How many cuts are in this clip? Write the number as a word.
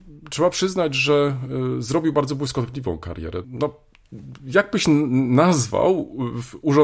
one